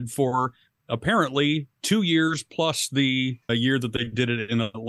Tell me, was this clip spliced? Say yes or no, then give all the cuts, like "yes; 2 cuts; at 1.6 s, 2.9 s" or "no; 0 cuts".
yes; 1 cut; at 3.5 s